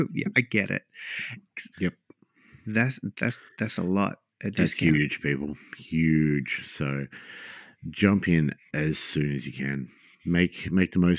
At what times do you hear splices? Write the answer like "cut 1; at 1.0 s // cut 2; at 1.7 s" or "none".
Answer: cut 1; at 1.7 s

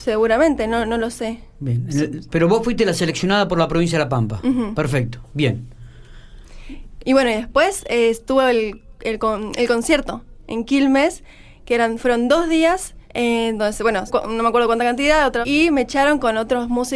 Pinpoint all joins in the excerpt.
cut 1; at 13.0 s // cut 2; at 14.1 s // cut 3; at 15.4 s

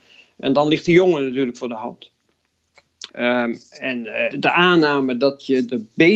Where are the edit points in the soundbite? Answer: cut 1; at 3.1 s // cut 2; at 4.3 s

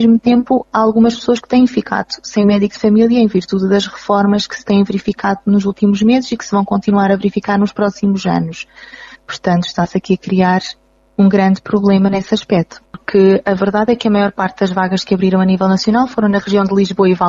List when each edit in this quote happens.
cut 1; at 9.1 s // cut 2; at 12.8 s

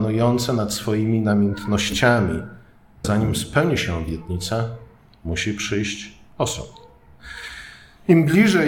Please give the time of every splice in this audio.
cut 1; at 3.0 s

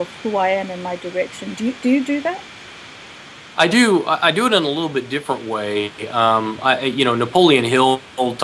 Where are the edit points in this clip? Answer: none

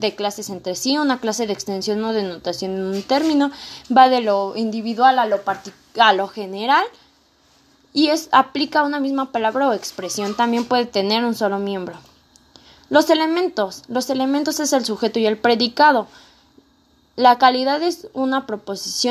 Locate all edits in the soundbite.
none

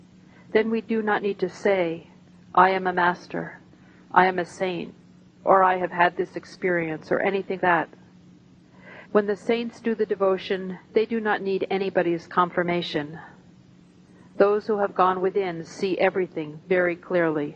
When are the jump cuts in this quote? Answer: cut 1; at 7.6 s // cut 2; at 9.1 s

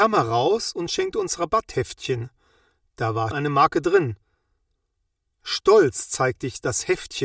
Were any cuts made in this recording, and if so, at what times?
cut 1; at 3.3 s

